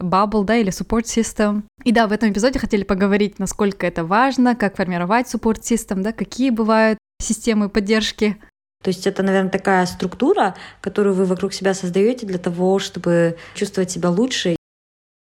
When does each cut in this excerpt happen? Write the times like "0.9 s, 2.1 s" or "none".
8.8 s, 13.6 s

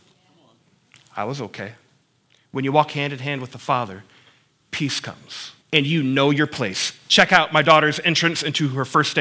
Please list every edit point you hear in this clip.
5.6 s

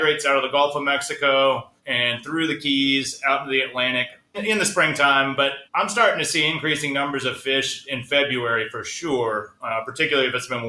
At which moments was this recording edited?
1.8 s, 4.3 s, 5.7 s

